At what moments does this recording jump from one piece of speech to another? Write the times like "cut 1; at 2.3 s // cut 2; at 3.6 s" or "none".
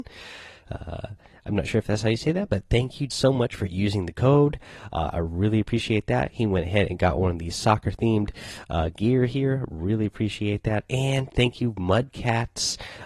cut 1; at 3.1 s